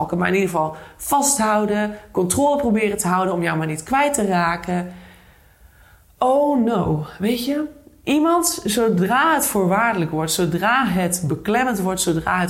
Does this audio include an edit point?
no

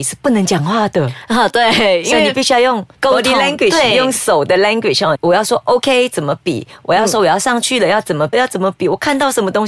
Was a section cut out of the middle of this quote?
yes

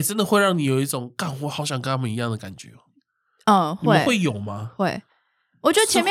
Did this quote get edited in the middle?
no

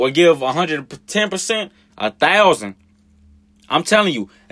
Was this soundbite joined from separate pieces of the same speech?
yes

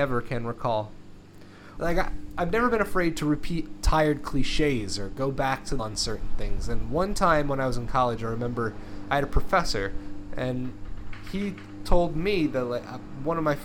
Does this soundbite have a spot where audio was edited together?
yes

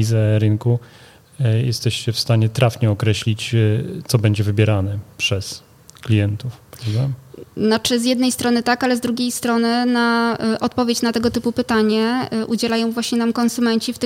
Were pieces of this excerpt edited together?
no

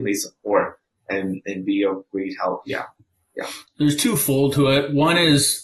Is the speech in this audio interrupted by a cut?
no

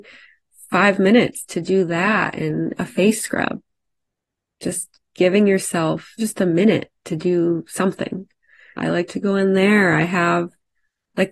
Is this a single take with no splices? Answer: no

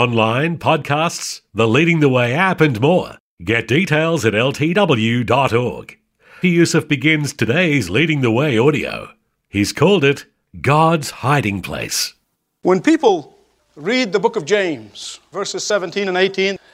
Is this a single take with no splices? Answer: no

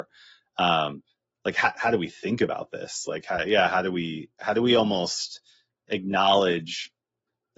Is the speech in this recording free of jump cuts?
yes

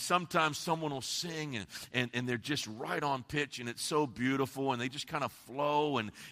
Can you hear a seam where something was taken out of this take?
no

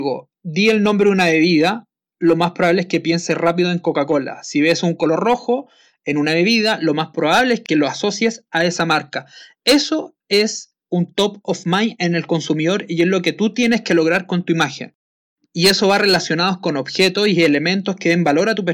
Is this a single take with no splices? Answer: yes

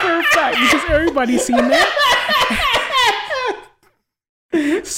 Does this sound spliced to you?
no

